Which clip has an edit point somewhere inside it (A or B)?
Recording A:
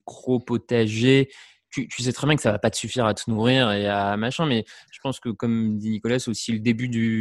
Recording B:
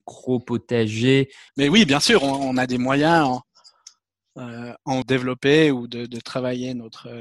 B